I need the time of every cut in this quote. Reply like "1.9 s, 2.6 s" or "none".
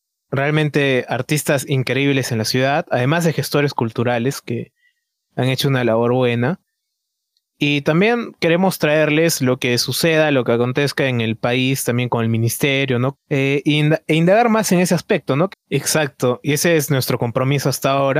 13.1 s, 15.5 s

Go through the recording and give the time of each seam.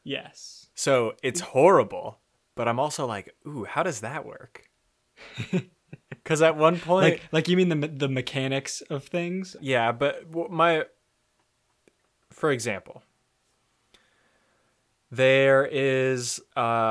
9.6 s

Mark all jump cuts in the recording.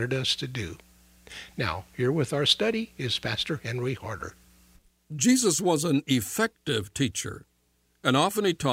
none

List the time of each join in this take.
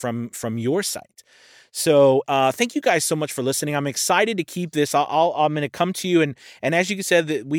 2.3 s

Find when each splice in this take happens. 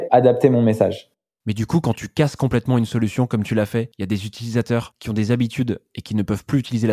none

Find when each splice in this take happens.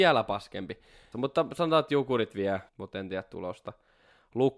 1.1 s, 2.7 s

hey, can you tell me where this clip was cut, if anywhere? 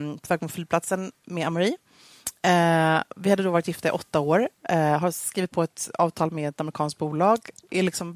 none

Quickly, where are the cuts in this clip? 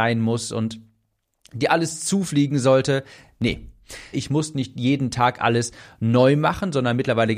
4.1 s

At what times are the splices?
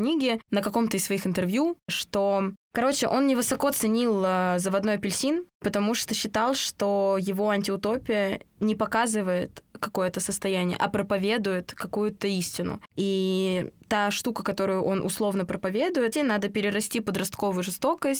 16.1 s

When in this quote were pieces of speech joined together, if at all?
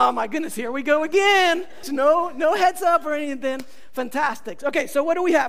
1.8 s

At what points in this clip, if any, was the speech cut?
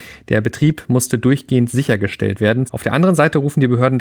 2.7 s

